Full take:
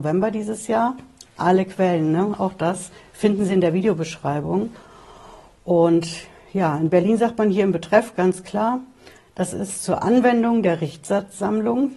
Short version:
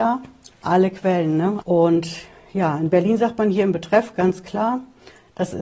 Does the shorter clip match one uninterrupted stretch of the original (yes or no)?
no